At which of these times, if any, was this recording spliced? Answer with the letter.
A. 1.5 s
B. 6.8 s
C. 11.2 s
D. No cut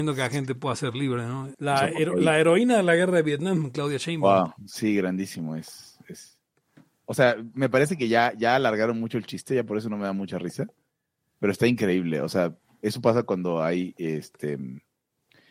A